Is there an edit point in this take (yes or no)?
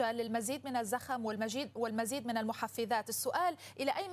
no